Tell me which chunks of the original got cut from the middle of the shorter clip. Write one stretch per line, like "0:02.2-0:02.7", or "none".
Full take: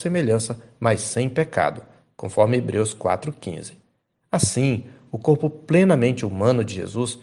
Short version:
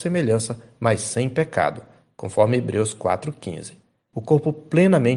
0:04.1-0:05.1